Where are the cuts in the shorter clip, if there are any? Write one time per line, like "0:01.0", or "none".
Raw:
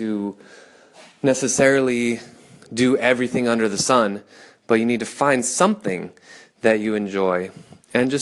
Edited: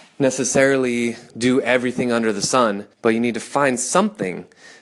0:01.3
0:02.9